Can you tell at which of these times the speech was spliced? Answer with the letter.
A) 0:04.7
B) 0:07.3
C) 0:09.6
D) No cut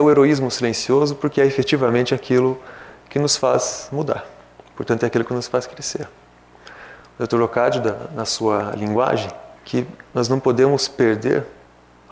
C